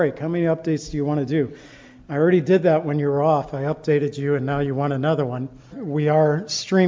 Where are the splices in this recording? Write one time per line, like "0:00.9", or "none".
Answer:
0:05.7